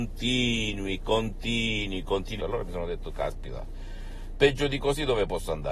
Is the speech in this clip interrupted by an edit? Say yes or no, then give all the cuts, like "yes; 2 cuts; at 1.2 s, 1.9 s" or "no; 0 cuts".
yes; 1 cut; at 2.4 s